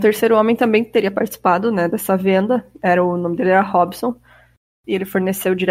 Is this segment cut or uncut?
uncut